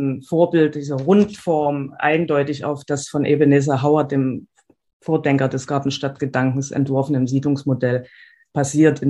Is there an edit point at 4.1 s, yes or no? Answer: no